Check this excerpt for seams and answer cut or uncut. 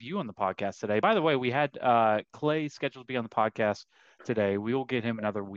uncut